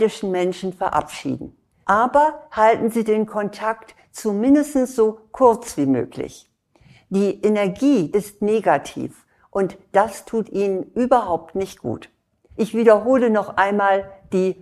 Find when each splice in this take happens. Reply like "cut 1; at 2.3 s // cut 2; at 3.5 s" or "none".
cut 1; at 1.8 s // cut 2; at 8.1 s // cut 3; at 12.5 s